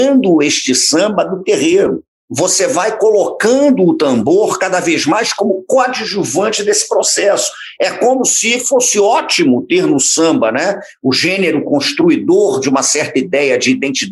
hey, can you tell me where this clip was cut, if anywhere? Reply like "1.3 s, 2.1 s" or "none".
7.8 s